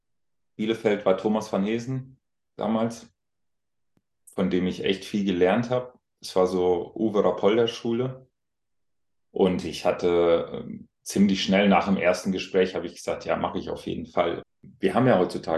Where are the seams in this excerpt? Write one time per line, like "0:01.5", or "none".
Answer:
0:14.4